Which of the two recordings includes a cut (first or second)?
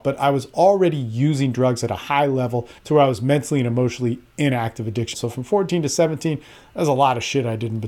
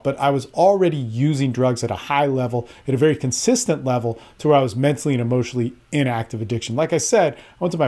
first